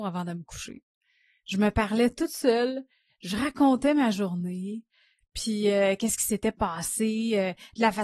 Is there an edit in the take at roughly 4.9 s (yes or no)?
no